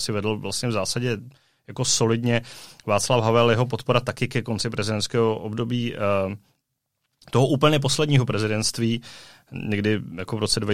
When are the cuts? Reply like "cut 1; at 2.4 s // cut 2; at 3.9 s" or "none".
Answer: none